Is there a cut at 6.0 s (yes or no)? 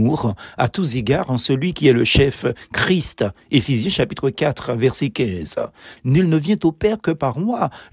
yes